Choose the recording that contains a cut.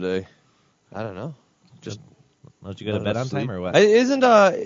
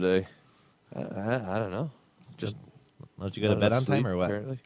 first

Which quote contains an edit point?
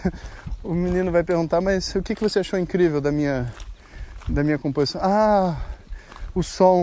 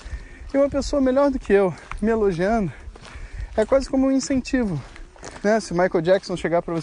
second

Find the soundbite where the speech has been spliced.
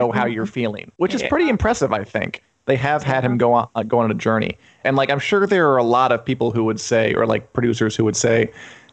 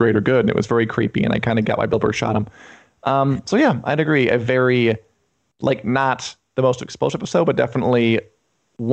first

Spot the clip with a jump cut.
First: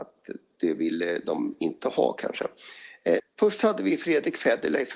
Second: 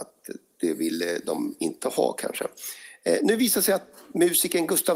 first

